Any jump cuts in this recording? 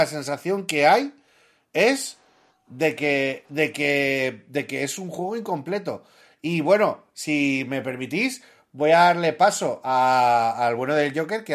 no; 0 cuts

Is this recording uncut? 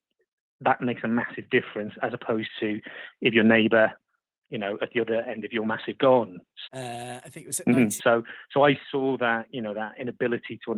no; 2 cuts; at 6.7 s, 8.0 s

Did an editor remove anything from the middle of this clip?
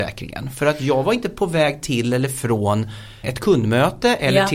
yes; 1 cut; at 3.2 s

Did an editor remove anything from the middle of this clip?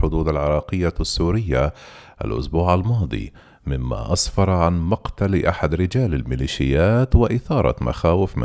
no; 0 cuts

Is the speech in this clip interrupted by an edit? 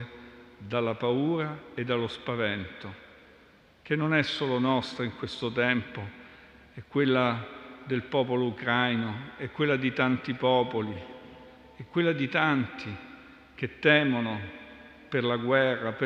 no; 0 cuts

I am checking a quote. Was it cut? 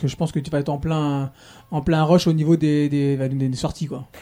no; 0 cuts

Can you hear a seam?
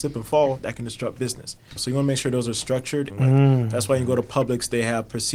yes; 2 cuts; at 1.8 s, 3.1 s

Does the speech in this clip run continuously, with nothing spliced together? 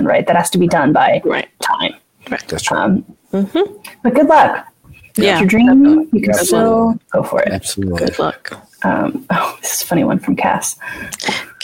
yes; 0 cuts

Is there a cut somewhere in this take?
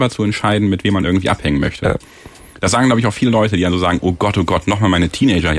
no; 0 cuts

